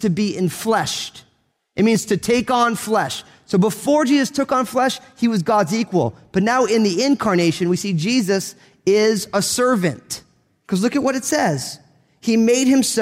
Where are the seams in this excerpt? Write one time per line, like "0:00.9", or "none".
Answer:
none